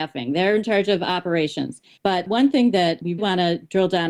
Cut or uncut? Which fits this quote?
cut